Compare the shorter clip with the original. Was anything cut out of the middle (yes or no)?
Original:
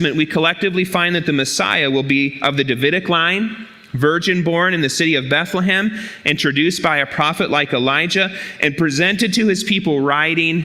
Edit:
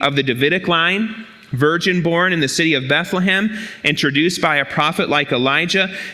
no